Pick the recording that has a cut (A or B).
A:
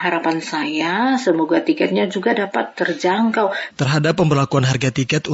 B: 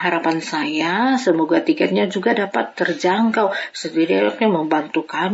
A